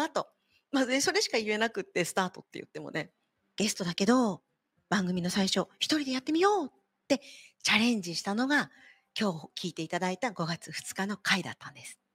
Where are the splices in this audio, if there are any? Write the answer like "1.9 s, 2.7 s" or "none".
3.4 s